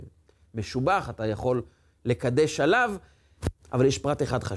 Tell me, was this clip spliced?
yes; 1 cut; at 3.6 s

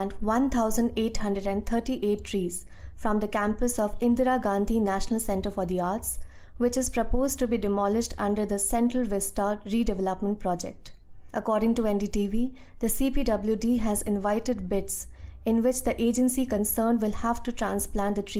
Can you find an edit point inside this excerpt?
no; 0 cuts

